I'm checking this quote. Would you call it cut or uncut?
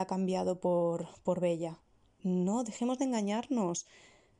cut